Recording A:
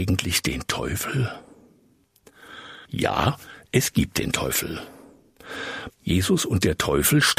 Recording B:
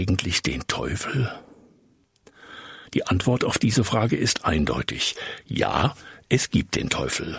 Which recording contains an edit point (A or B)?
A